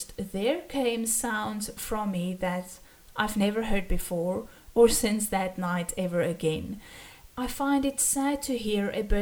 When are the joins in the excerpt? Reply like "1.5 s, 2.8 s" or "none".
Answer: 7.3 s